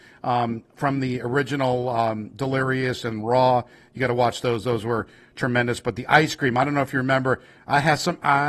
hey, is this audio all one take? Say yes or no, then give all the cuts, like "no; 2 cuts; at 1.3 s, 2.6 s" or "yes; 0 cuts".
yes; 0 cuts